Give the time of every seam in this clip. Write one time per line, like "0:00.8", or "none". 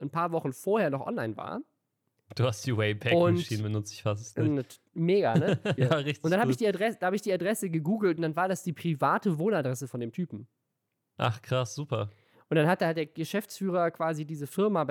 0:05.8